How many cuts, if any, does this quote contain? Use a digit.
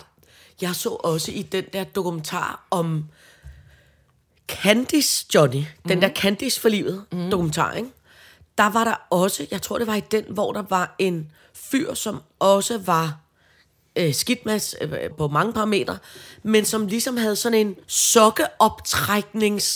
2